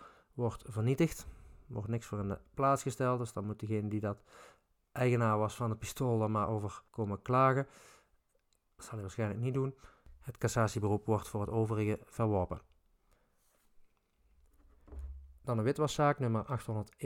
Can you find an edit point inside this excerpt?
yes; 1 cut; at 6.9 s

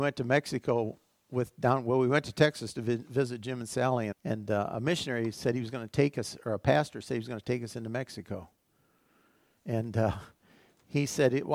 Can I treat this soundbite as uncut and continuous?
no; 2 cuts; at 4.1 s, 9.6 s

